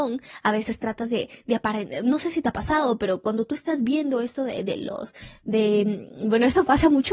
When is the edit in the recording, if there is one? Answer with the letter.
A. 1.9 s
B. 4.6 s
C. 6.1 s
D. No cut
D